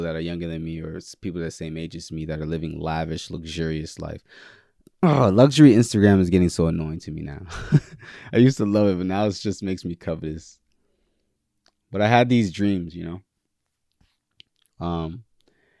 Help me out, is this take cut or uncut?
uncut